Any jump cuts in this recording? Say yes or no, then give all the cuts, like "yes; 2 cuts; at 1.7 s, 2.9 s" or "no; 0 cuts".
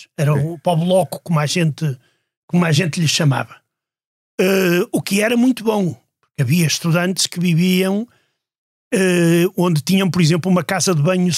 no; 0 cuts